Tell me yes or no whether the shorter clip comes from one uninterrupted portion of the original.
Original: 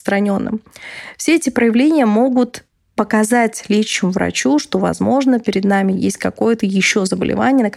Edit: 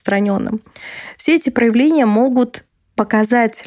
yes